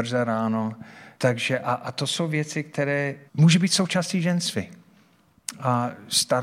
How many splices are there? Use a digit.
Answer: 2